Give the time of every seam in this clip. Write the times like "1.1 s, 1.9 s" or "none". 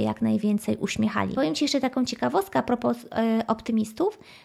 1.3 s